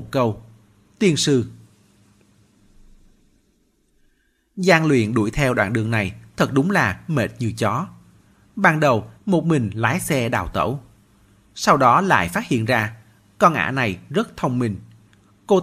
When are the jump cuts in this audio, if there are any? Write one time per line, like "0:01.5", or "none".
0:09.2